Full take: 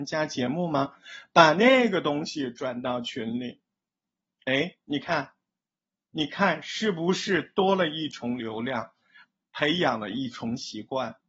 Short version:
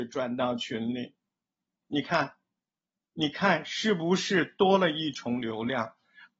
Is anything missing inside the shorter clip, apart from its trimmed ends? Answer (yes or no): yes